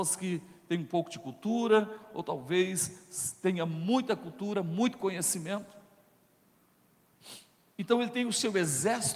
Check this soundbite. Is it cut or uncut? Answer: uncut